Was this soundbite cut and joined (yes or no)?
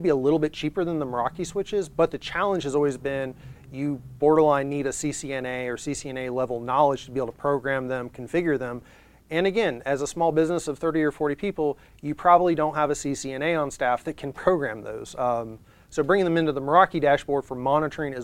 no